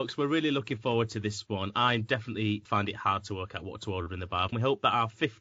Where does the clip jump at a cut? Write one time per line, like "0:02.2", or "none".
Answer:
0:04.5